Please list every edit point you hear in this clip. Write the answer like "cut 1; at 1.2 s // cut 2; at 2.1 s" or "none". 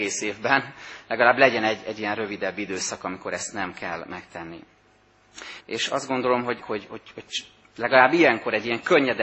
cut 1; at 5.6 s // cut 2; at 6.6 s